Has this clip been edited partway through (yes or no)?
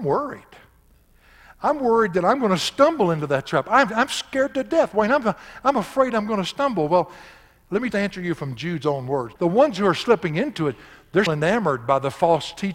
yes